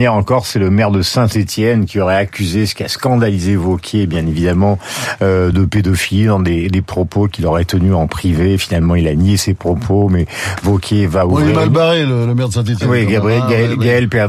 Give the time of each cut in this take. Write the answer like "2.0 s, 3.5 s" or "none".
none